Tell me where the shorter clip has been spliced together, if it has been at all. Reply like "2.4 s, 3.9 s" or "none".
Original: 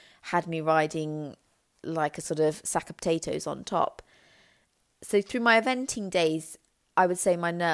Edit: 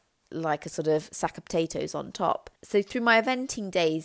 2.6 s